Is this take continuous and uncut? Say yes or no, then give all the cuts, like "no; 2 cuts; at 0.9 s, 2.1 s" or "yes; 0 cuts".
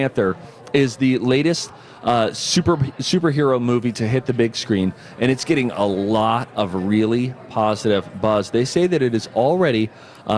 yes; 0 cuts